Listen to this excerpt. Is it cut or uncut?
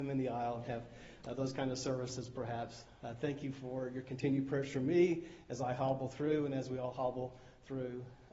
uncut